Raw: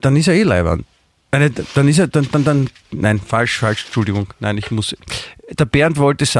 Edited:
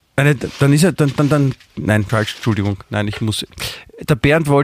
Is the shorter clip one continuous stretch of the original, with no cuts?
no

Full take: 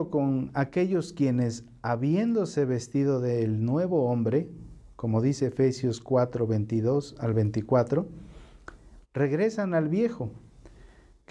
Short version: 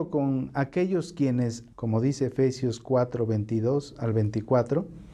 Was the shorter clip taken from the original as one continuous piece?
no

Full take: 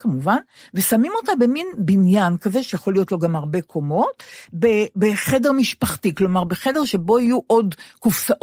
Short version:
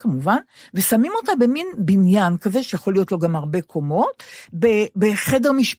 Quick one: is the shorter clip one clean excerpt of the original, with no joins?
yes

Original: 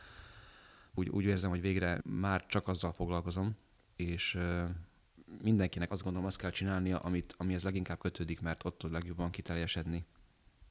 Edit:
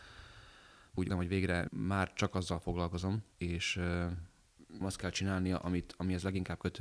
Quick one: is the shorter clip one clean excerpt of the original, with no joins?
no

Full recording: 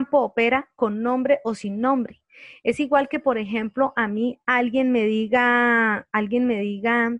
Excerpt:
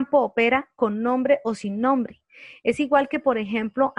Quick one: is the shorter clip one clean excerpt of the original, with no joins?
yes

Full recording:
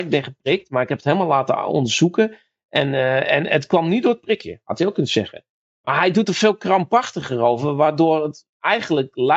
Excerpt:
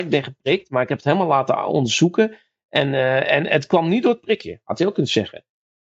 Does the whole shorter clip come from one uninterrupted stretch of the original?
yes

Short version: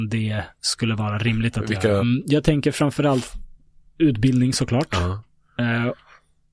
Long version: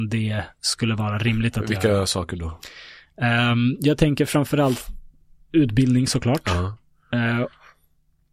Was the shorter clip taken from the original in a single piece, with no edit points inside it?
no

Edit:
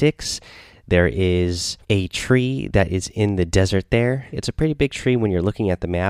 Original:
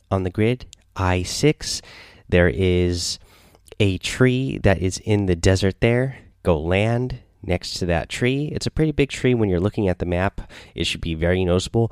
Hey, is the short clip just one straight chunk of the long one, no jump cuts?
no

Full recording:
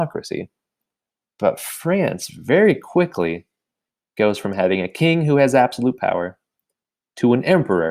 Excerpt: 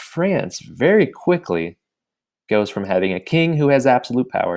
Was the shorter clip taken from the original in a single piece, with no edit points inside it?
yes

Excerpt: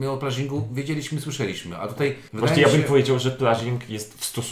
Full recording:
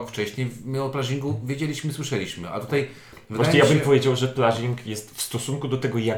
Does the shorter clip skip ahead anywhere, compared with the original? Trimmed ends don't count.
yes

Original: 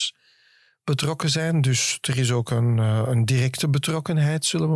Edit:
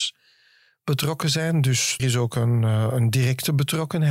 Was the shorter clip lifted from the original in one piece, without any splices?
no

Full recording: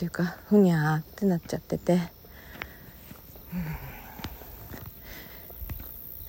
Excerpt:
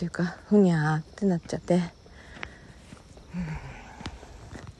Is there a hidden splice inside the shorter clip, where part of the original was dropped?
yes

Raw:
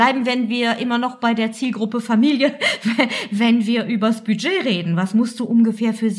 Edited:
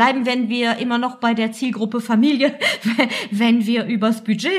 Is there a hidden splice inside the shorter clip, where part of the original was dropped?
no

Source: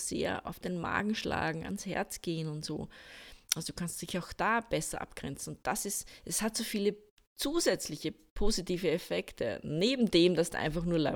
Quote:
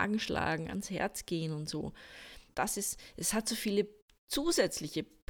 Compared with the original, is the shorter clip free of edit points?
no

